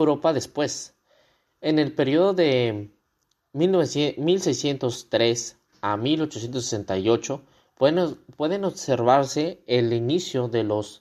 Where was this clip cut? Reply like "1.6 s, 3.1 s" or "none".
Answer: none